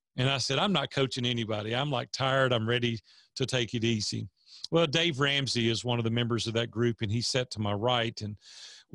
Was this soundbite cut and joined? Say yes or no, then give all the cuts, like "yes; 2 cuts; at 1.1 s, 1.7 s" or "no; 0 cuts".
no; 0 cuts